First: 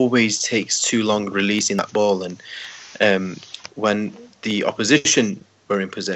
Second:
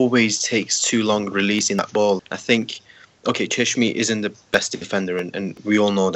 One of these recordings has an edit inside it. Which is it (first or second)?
second